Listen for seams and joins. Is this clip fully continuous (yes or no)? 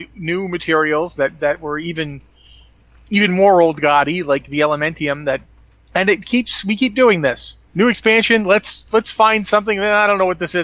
no